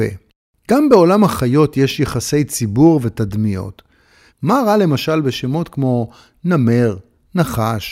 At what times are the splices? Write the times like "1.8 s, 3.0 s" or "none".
4.3 s